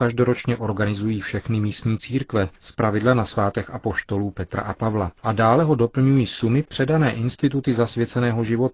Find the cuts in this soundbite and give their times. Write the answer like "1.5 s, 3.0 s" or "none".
5.2 s